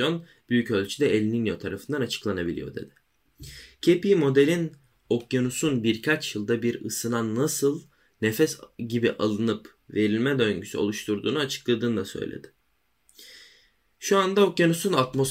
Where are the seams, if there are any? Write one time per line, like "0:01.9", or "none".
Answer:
none